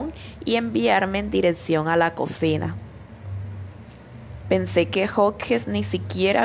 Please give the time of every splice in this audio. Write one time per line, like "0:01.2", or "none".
0:04.4